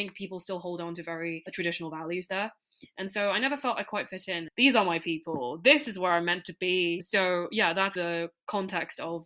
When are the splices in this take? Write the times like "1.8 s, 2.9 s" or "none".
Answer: 4.5 s